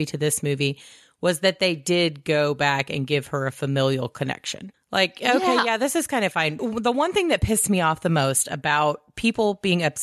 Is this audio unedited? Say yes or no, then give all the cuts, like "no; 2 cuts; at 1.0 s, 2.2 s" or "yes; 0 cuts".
yes; 0 cuts